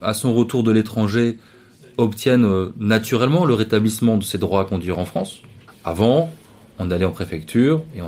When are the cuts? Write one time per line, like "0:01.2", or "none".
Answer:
0:05.7